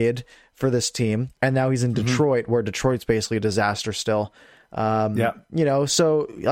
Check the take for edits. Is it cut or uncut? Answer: uncut